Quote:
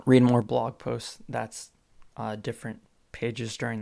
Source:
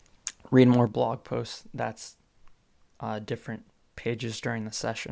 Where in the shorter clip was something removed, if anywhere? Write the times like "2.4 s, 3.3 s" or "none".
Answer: 2.1 s